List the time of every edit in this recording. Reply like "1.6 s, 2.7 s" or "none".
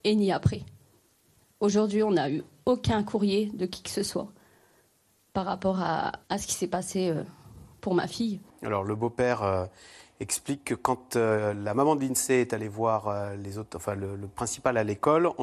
6.2 s, 8.5 s